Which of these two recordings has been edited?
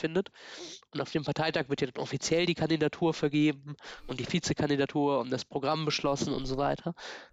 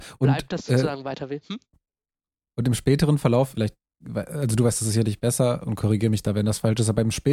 second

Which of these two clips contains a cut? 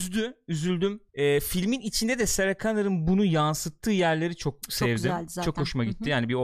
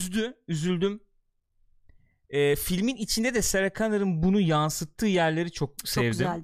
first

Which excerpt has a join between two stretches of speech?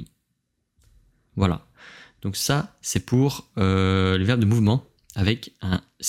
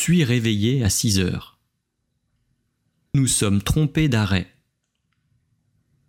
second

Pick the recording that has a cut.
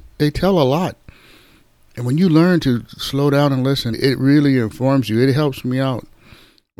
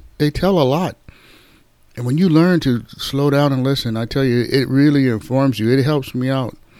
first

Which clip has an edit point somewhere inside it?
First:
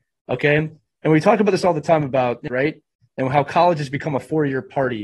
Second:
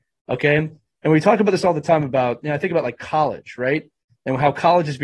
first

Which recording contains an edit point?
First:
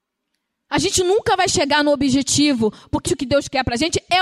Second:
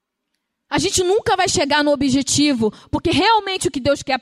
first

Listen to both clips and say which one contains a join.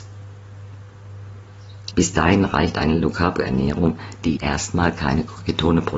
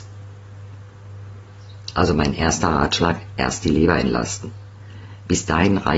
first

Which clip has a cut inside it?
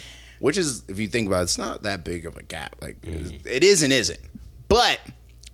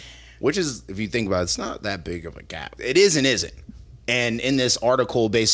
second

